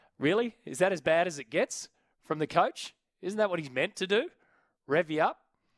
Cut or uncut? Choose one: uncut